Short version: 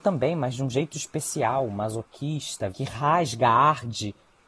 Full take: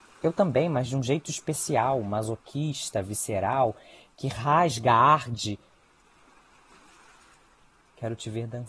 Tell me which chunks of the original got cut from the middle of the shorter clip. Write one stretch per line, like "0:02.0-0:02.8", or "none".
0:03.0-0:04.1